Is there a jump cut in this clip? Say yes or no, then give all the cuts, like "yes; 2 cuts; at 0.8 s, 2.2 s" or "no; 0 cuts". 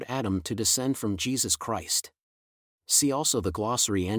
yes; 1 cut; at 2.7 s